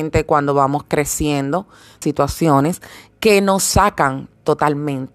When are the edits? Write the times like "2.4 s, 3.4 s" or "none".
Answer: 2.0 s